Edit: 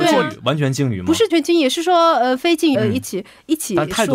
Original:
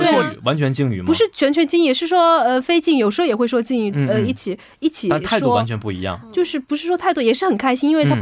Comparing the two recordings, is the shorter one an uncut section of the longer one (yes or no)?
no